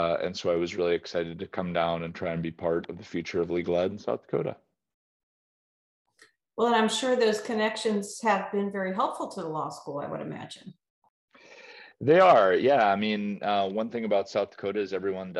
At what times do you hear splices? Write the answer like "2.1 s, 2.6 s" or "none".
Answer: none